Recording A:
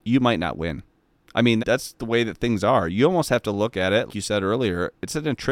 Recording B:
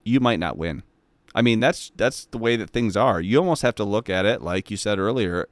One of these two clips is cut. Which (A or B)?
A